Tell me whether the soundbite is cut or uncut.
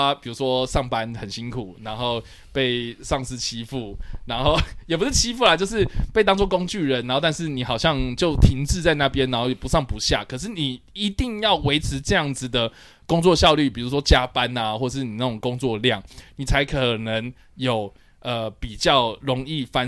uncut